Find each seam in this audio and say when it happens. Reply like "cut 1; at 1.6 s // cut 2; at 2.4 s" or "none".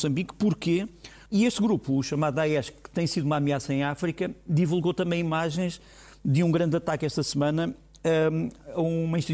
cut 1; at 1.3 s

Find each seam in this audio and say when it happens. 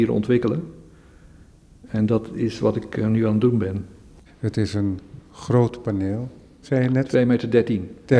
cut 1; at 4.3 s // cut 2; at 6.6 s

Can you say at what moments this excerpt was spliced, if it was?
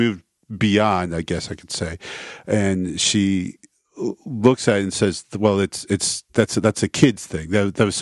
none

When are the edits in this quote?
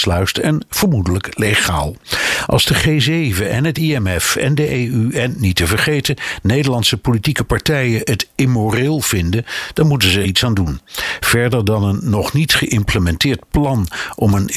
cut 1; at 10.2 s

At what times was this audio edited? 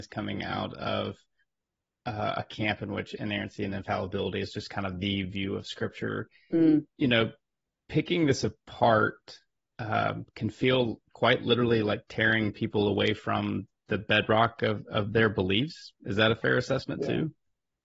none

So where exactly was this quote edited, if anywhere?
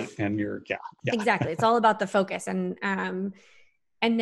none

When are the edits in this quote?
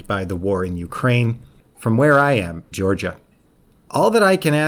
cut 1; at 1.6 s // cut 2; at 2.7 s

